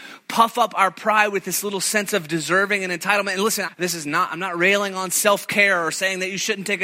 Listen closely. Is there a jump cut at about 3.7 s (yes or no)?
yes